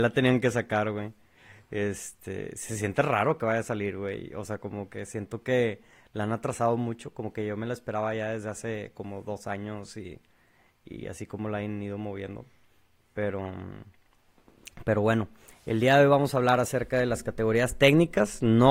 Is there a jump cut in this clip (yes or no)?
no